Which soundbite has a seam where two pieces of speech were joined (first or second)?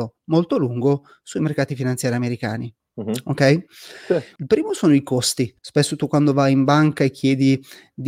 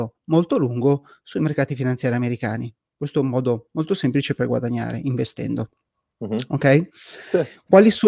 first